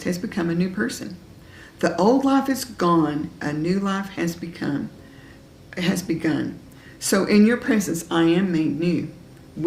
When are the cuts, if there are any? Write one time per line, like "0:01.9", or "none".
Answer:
none